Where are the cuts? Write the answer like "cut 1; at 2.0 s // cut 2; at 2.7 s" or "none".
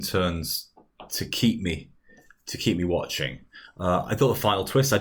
none